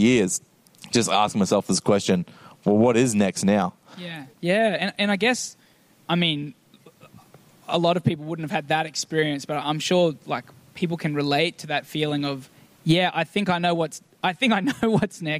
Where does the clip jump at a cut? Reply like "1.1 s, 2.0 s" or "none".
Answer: 4.3 s

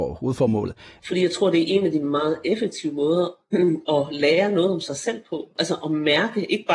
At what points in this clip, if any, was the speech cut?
1.0 s, 5.6 s

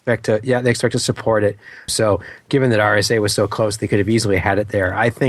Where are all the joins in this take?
1.9 s

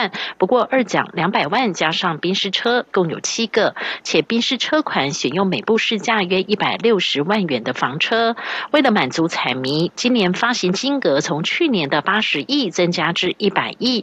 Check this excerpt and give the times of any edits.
2.9 s

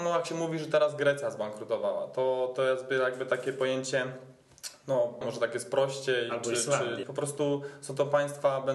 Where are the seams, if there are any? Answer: 5.2 s, 7.0 s

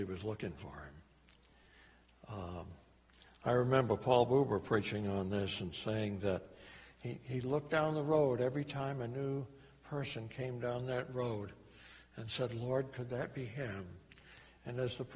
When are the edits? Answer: none

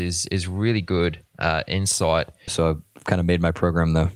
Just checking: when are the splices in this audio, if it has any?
2.5 s

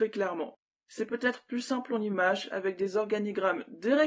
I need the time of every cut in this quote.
none

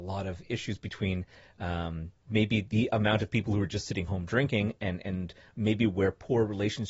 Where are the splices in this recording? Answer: none

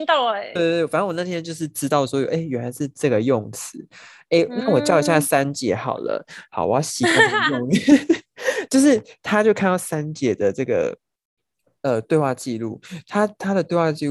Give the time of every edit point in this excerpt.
none

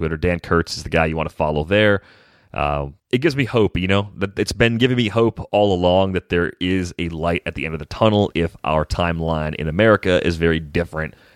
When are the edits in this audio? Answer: 3.0 s, 8.3 s

